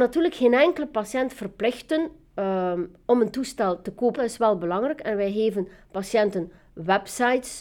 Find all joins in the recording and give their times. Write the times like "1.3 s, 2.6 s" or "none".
4.2 s